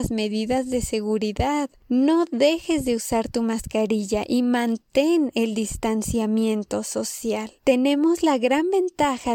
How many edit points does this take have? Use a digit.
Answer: 1